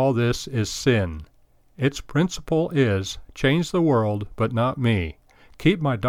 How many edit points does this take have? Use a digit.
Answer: 0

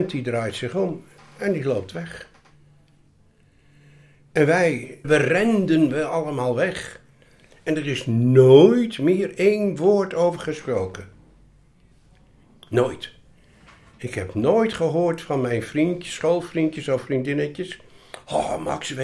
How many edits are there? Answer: 1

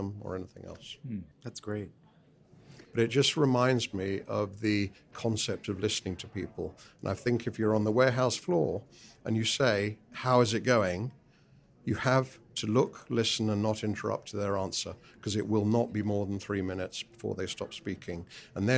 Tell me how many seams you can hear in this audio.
2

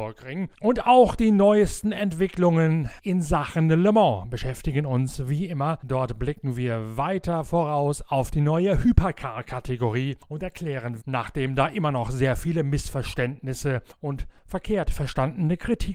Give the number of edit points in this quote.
1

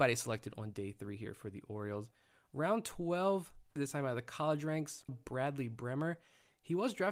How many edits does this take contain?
2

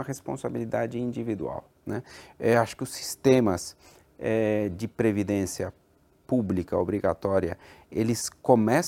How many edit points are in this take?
0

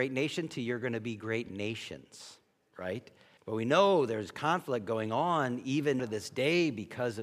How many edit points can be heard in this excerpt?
2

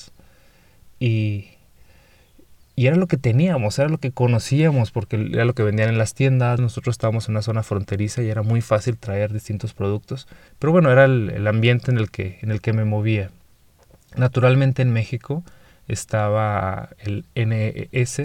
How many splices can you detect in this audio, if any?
2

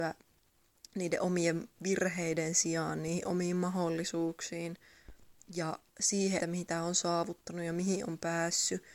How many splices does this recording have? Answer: 1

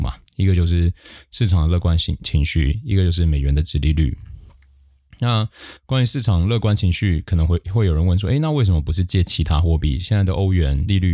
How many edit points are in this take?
0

